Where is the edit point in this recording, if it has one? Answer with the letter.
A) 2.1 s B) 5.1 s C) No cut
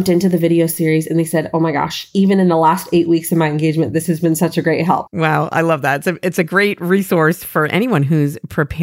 B